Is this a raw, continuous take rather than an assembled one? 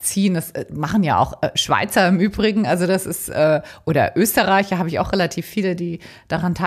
yes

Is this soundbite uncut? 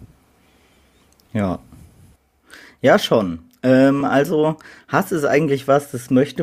yes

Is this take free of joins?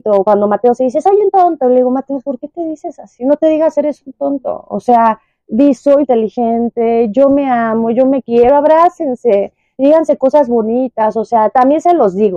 no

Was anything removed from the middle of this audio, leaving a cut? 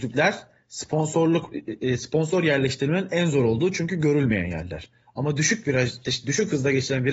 yes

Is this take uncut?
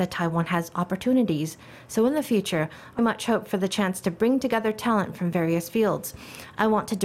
no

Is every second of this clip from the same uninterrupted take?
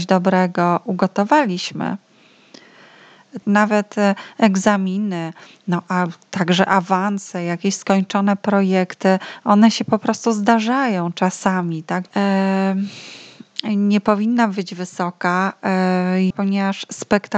no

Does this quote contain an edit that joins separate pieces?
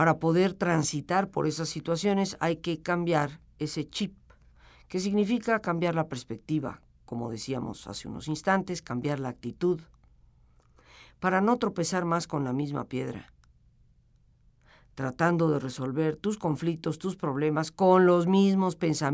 no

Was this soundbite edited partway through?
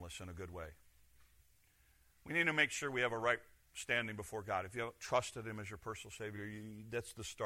no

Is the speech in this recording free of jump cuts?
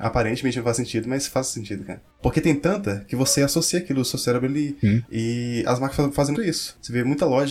no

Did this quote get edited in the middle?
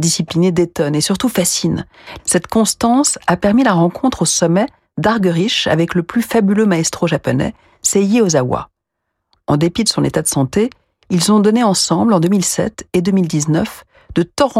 yes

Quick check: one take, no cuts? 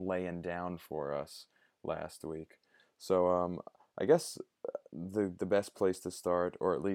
yes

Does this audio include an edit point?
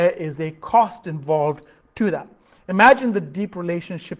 no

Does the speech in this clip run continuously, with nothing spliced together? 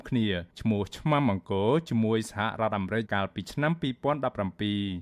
no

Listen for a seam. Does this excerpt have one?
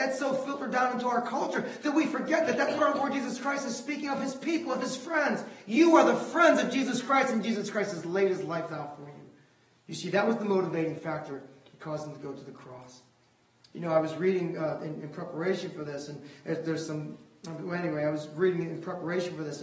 no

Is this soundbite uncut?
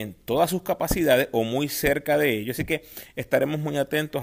yes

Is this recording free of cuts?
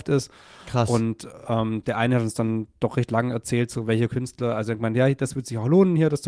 yes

